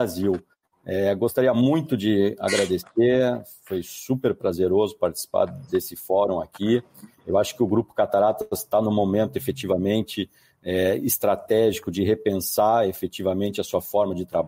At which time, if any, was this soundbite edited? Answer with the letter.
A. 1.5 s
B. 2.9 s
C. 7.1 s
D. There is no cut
D